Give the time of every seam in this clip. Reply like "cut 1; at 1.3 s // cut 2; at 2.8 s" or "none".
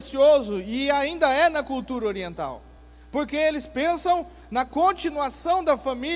none

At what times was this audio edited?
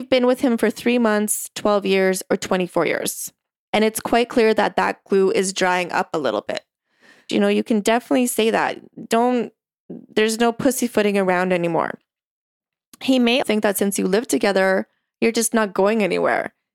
cut 1; at 3.7 s // cut 2; at 7.3 s // cut 3; at 13.4 s

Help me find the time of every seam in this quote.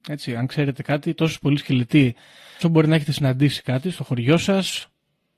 cut 1; at 2.6 s

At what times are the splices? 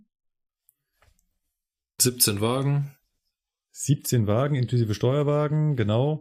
none

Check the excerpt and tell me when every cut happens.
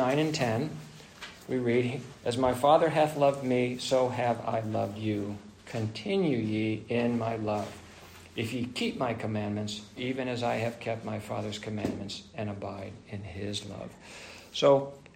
cut 1; at 2.2 s // cut 2; at 10.0 s

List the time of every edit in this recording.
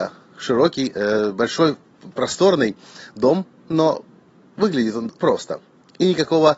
cut 1; at 5.2 s

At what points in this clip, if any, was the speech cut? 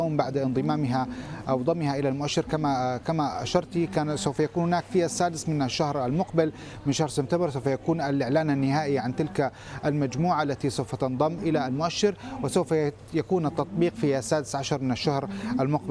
cut 1; at 11.4 s

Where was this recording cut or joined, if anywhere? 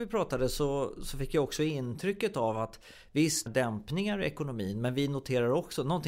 cut 1; at 3.5 s

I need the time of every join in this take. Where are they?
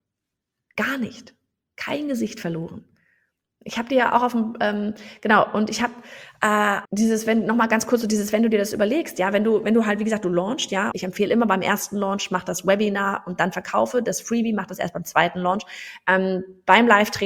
cut 1; at 6.8 s // cut 2; at 10.9 s

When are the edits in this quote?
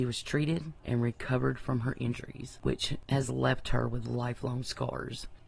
none

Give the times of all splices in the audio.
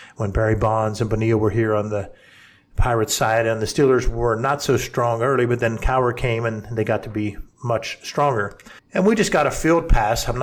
cut 1; at 8.8 s

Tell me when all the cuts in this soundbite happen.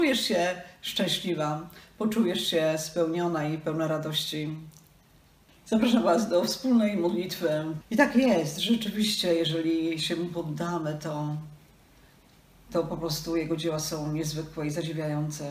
cut 1; at 7.8 s

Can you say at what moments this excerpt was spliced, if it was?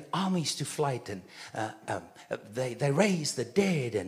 none

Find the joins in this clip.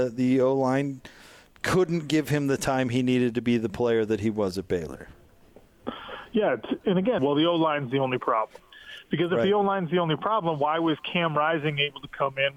cut 1; at 7.2 s

